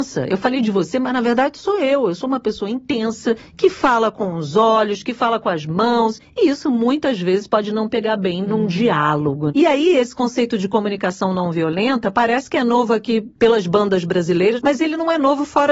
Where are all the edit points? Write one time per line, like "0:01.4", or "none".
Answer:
none